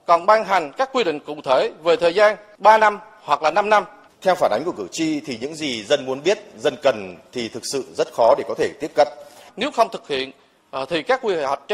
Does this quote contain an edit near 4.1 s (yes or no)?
yes